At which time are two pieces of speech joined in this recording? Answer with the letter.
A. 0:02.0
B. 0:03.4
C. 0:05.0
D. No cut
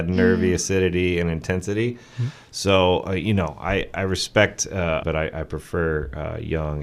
C